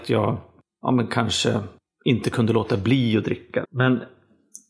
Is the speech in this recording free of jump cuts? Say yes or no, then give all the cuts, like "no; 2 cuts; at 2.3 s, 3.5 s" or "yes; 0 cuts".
no; 1 cut; at 3.6 s